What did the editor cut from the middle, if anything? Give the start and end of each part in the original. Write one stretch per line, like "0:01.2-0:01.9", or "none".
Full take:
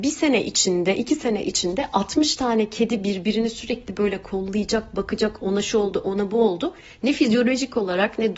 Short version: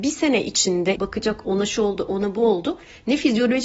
0:01.0-0:04.9